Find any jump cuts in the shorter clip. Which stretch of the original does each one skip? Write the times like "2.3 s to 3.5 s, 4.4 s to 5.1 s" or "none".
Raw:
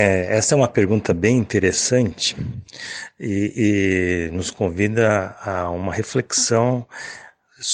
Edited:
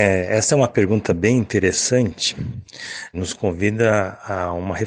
3.1 s to 4.3 s

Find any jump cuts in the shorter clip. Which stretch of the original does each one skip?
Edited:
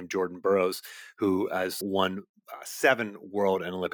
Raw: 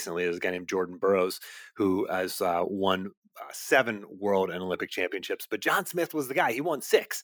2.4 s to 2.7 s

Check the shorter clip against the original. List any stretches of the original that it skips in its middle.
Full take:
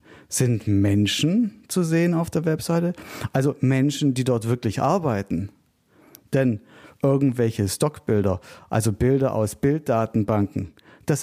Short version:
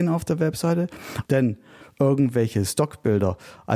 3.3 s to 6.3 s

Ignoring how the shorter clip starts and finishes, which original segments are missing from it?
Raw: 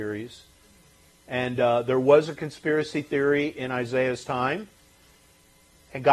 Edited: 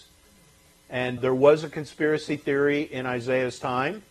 1.6 s to 1.8 s

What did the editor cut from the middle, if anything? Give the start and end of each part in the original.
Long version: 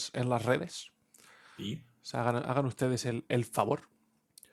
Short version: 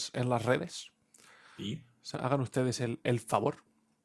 2.1 s to 2.4 s

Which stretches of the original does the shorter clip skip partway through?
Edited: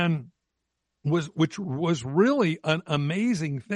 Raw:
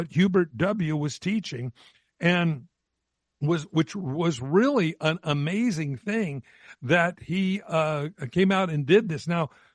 none

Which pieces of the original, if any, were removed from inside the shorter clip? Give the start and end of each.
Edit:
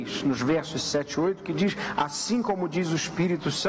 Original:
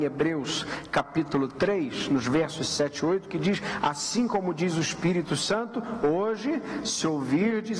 none

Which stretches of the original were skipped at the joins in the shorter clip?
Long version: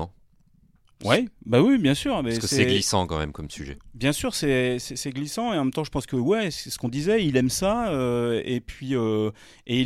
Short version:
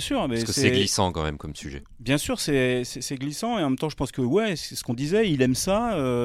none

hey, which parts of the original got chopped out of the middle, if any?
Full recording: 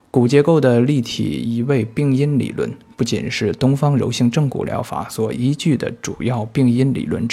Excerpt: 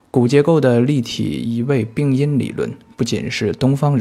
none

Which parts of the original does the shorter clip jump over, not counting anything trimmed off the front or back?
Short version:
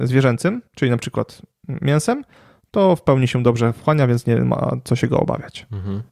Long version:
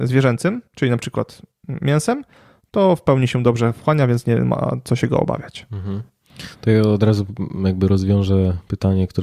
none

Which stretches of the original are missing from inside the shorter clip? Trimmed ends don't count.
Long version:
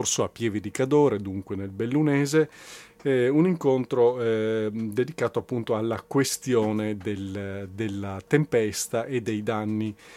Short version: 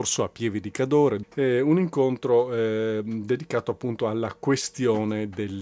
1.2 s to 2.9 s

